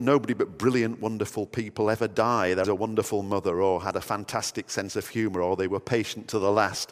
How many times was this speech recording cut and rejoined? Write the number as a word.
one